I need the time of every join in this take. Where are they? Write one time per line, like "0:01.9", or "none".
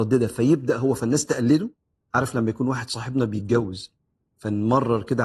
none